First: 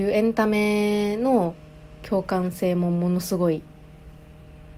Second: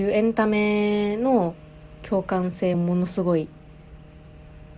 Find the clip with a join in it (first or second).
second